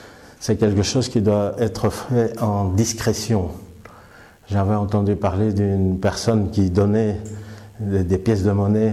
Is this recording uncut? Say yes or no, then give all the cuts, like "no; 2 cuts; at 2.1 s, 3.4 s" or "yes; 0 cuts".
yes; 0 cuts